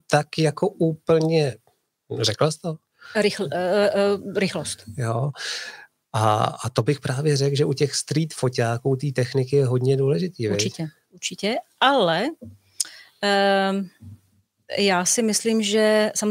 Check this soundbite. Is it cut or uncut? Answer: uncut